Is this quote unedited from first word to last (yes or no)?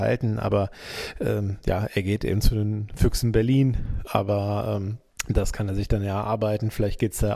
no